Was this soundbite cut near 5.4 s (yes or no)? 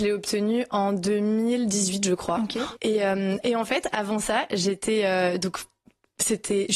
no